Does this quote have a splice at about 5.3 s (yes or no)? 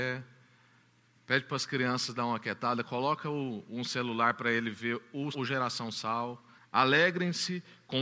yes